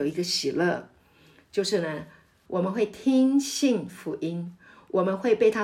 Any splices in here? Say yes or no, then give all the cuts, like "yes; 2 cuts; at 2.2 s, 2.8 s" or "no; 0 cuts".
yes; 1 cut; at 2.5 s